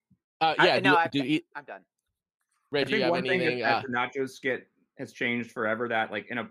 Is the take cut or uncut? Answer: uncut